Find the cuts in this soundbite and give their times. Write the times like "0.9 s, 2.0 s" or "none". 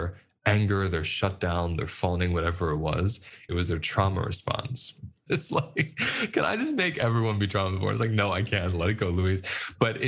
3.5 s, 5.3 s